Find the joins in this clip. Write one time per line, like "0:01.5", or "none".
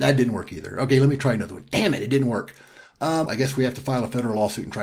0:03.3